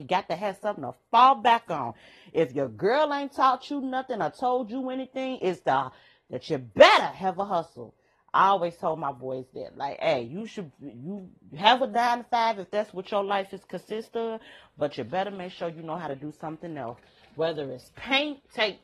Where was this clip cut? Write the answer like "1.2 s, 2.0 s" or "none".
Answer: none